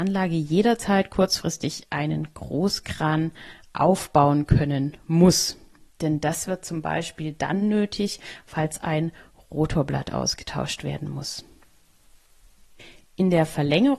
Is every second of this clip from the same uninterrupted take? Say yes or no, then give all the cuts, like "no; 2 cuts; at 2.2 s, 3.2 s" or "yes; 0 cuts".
yes; 0 cuts